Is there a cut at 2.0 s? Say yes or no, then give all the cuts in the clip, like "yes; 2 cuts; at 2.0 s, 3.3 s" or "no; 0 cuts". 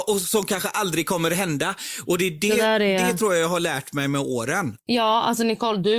no; 1 cut; at 4.8 s